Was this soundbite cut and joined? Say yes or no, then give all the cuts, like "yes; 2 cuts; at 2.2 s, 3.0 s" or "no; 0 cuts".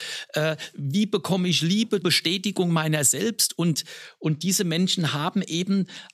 yes; 1 cut; at 2.0 s